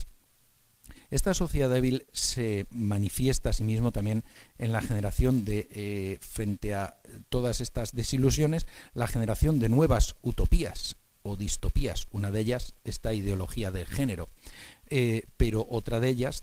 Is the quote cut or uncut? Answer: uncut